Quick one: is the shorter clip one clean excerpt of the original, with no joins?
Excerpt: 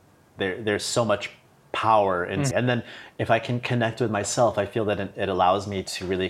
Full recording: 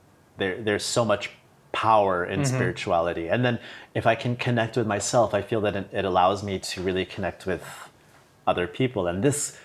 no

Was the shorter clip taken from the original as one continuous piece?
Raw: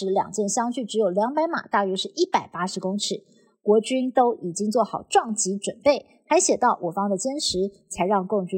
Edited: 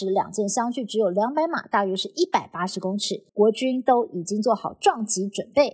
no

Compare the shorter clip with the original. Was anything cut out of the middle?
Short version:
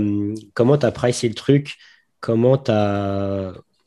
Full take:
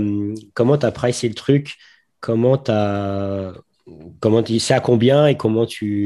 no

